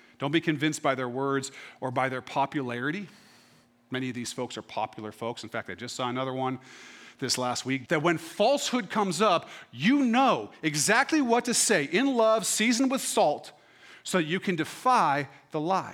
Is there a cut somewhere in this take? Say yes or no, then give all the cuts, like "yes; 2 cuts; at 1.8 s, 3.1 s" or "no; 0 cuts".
yes; 1 cut; at 7.8 s